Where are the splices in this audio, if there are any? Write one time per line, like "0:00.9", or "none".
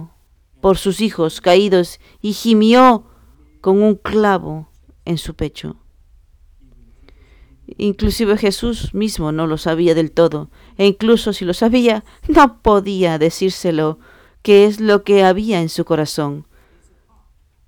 none